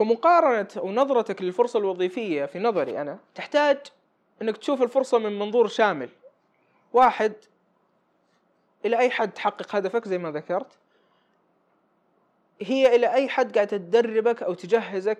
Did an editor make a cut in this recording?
yes; 1 cut; at 3.3 s

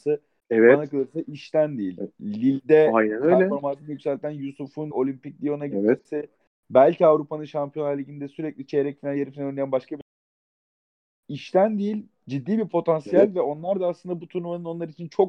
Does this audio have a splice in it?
yes; 1 cut; at 4.9 s

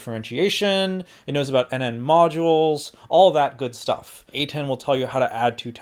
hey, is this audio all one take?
no; 1 cut; at 4.3 s

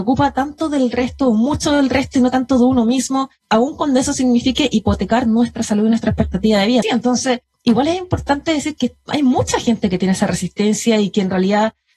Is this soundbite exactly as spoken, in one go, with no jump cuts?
no; 2 cuts; at 6.8 s, 8.8 s

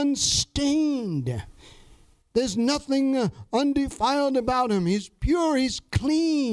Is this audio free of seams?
yes; 0 cuts

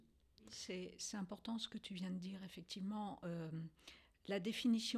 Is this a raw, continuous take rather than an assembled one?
yes; 0 cuts

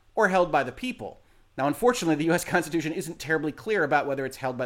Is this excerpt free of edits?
yes; 0 cuts

